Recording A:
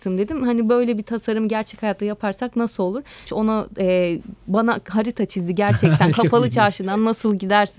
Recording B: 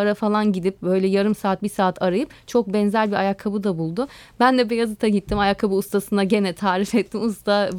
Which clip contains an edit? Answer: A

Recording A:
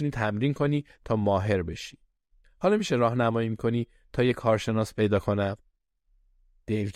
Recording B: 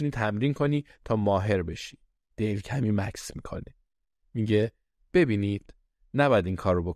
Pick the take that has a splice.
B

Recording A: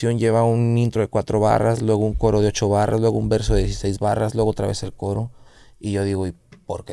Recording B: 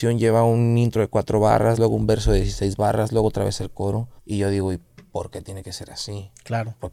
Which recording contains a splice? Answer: B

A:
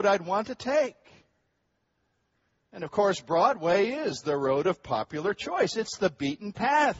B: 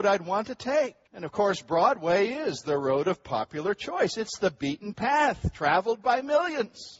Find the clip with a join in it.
B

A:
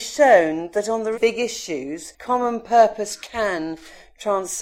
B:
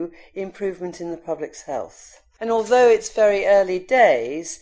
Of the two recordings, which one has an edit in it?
A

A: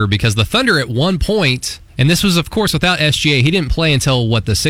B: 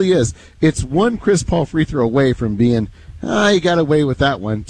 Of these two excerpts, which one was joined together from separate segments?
A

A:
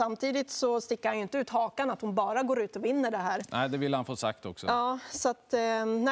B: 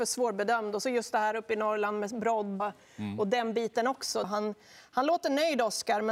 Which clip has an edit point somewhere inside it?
B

